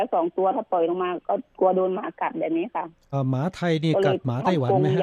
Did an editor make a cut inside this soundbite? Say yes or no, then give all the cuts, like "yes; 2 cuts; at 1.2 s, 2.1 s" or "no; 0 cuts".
yes; 1 cut; at 3.1 s